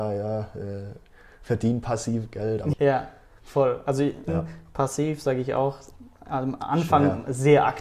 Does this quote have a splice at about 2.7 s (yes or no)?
yes